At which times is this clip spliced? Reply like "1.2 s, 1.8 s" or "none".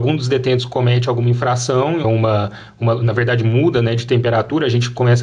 2.0 s